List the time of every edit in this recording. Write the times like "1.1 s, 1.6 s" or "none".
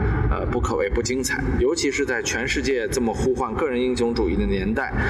1.6 s